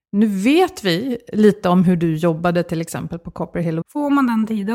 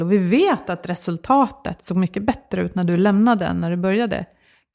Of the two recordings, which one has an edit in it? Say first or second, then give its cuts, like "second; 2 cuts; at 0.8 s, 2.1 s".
first; 1 cut; at 3.8 s